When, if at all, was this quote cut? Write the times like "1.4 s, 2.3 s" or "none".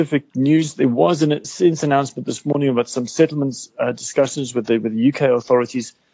1.4 s